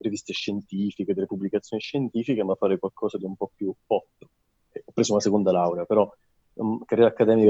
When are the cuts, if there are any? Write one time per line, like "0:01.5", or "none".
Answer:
0:04.5